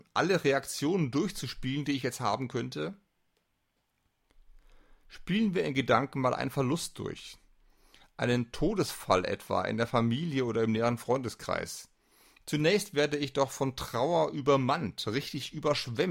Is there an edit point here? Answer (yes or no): no